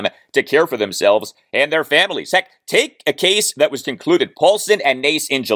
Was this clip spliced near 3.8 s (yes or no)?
yes